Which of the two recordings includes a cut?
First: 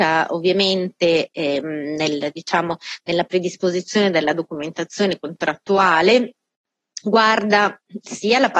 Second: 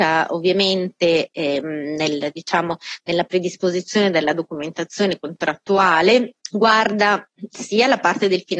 second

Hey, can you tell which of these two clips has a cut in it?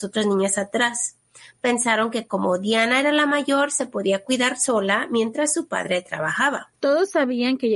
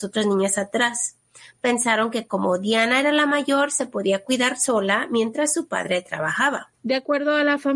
second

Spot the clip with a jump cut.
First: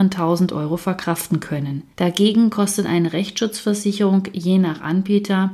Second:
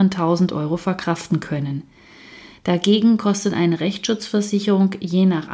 first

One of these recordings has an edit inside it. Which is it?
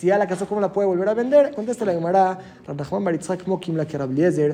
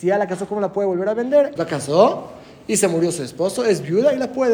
second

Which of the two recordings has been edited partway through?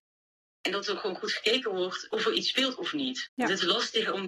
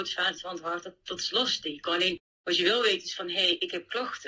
first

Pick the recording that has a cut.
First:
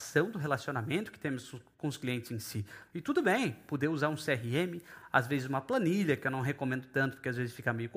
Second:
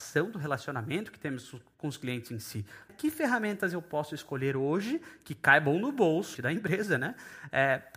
second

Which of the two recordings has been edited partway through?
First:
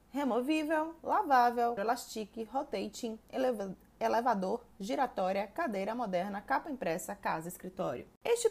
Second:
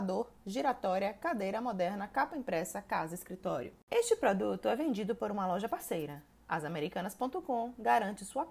first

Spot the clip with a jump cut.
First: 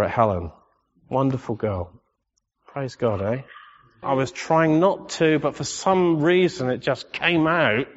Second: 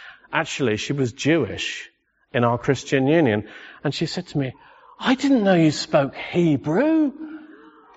first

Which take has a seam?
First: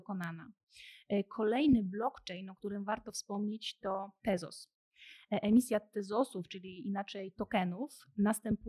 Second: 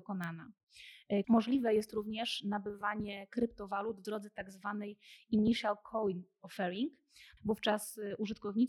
second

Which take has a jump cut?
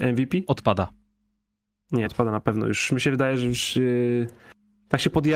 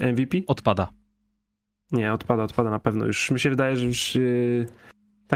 first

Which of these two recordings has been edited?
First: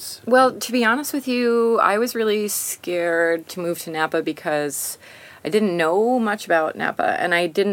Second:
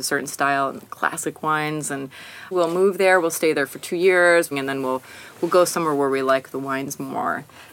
second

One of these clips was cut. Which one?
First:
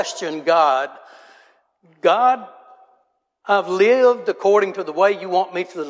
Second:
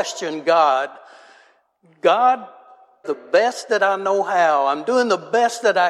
second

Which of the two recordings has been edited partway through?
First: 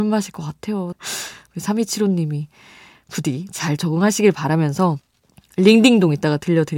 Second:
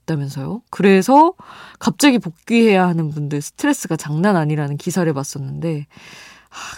first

